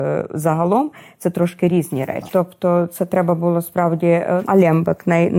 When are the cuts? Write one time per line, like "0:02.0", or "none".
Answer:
0:02.3
0:04.4

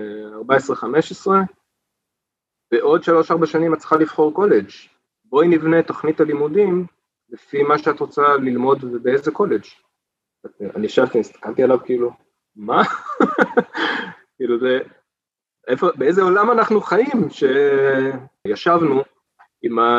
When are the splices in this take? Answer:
0:18.5

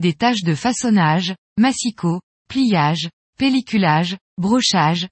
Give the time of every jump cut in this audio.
none

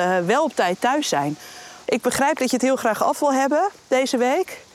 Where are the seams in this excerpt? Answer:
0:01.8

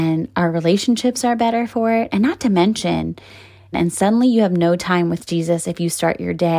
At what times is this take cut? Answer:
0:03.7

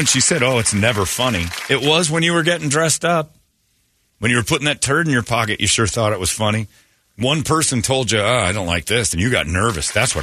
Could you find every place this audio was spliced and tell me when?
0:09.1

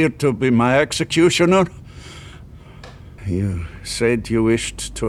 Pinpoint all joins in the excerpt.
0:03.2

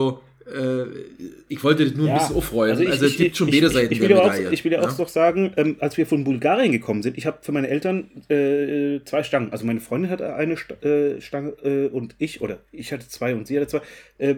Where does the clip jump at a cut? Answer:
none

